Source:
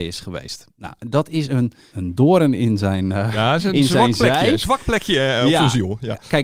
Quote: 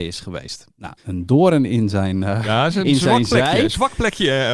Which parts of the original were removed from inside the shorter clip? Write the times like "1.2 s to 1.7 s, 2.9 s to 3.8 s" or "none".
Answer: 1.0 s to 1.9 s